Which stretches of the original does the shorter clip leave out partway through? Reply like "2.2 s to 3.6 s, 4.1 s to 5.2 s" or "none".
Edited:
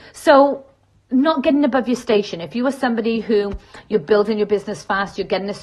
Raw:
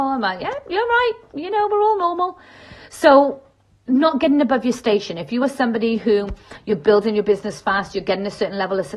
none